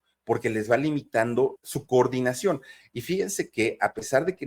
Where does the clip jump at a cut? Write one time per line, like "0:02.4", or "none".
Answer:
0:01.6
0:02.8